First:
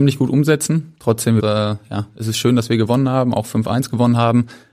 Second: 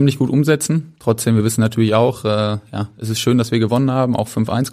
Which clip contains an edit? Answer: first; 1 cut; at 1.4 s

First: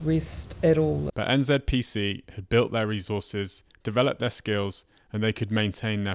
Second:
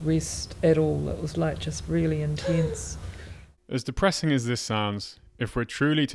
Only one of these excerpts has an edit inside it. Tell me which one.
first; 1 cut; at 1.1 s

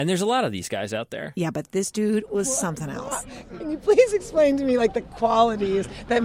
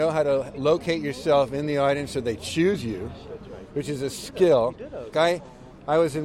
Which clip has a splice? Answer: second; 1 cut; at 5.1 s

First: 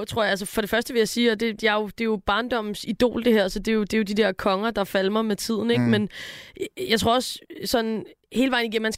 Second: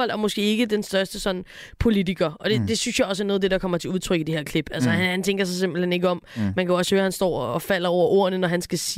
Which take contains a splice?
first; 1 cut; at 1.6 s

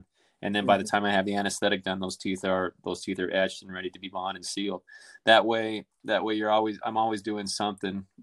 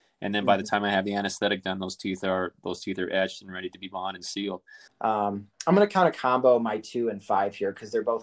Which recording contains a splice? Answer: second; 1 cut; at 4.9 s

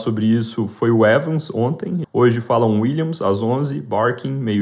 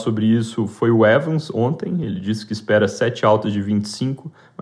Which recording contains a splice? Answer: first; 1 cut; at 2.0 s

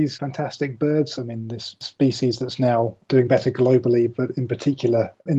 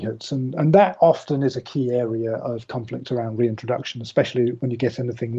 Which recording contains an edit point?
first; 1 cut; at 1.2 s

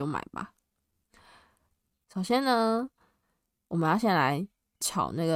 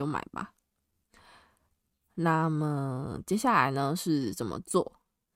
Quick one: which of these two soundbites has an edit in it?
first; 1 cut; at 2.0 s

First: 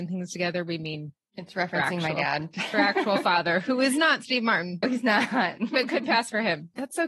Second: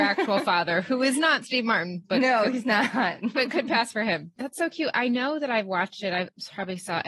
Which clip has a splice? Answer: first; 1 cut; at 4.8 s

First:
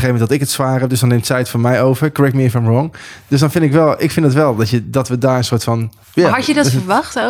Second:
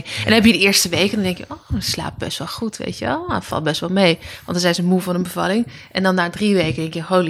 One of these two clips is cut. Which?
first; 1 cut; at 6.0 s

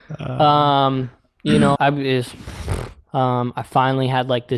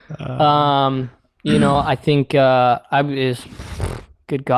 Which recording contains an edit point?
first; 2 cuts; at 1.7 s, 3.1 s

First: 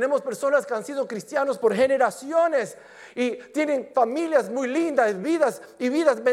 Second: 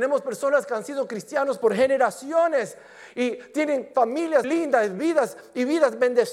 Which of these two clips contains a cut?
second; 1 cut; at 4.4 s

